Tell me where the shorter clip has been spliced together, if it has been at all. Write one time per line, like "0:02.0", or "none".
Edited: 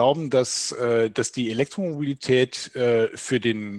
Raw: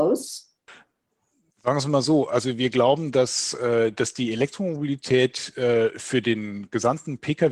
none